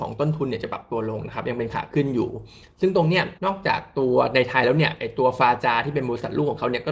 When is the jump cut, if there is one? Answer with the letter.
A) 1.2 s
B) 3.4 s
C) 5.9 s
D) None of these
B